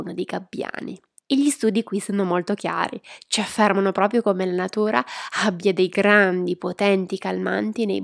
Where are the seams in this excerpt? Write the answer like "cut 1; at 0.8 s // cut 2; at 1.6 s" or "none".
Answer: cut 1; at 1.2 s